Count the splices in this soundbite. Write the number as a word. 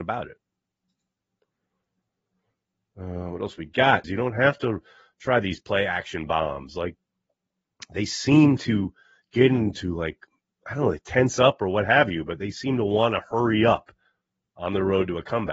one